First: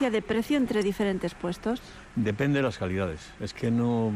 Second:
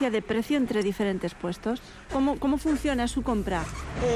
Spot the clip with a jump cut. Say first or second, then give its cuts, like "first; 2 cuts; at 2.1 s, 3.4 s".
second; 1 cut; at 2.1 s